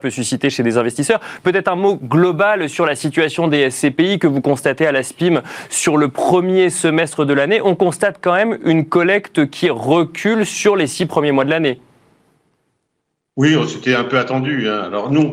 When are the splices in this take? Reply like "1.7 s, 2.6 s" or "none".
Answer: none